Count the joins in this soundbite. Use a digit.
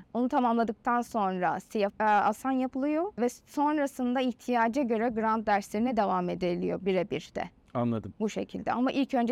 1